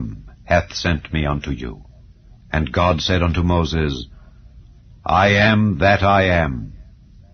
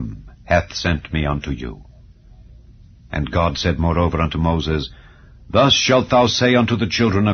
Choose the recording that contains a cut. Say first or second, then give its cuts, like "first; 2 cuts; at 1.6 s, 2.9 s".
first; 1 cut; at 2.4 s